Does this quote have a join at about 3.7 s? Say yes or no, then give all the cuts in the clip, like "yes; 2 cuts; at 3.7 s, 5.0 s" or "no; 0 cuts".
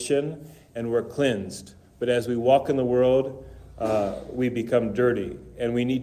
no; 0 cuts